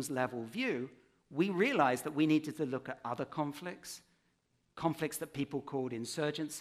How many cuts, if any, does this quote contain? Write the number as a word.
zero